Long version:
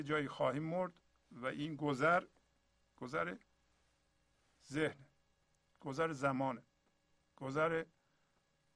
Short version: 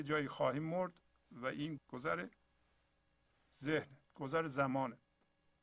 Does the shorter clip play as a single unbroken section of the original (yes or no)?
no